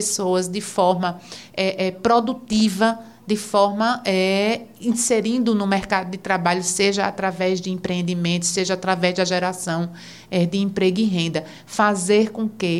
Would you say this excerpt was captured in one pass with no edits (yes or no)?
yes